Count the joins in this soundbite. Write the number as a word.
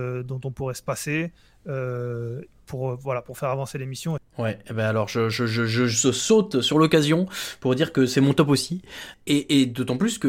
two